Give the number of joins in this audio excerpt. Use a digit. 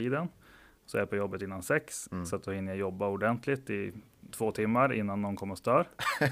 1